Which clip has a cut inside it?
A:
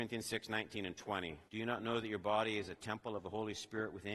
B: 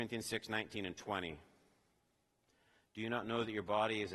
A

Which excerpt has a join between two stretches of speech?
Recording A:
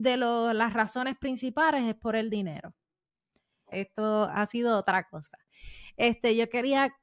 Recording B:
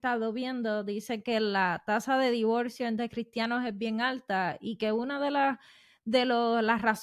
A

